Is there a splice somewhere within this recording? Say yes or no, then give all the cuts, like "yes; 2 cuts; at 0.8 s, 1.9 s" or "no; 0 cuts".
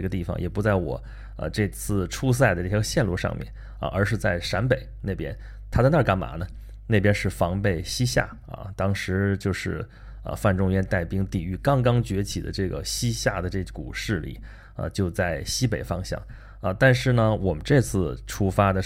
no; 0 cuts